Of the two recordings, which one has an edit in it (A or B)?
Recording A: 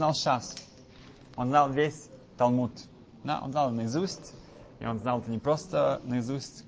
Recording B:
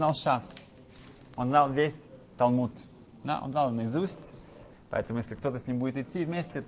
B